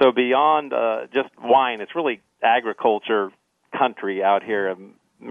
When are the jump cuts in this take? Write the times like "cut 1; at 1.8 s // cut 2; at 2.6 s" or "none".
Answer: none